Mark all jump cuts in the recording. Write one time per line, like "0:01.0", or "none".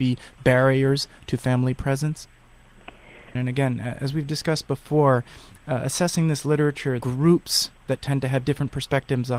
0:03.3
0:07.0

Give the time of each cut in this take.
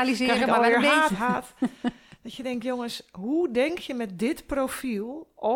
0:01.1

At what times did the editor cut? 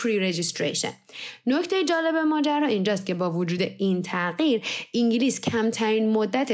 none

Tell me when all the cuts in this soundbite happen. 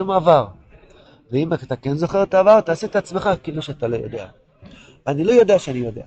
none

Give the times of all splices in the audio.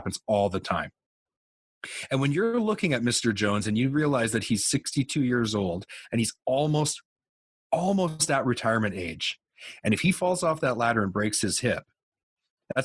none

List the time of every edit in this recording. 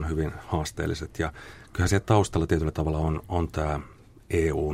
none

